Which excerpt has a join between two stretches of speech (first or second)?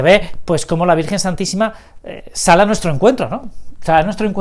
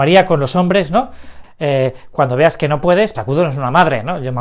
second